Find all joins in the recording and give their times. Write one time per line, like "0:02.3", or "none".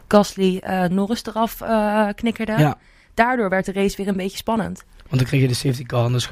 none